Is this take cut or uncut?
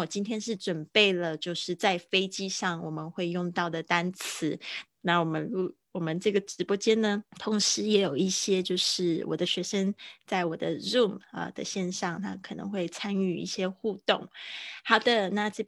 cut